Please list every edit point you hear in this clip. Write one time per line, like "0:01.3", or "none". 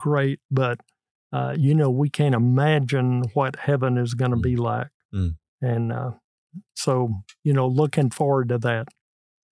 none